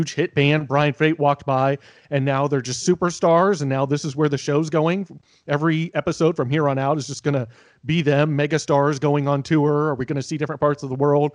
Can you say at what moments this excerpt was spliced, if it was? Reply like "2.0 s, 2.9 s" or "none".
none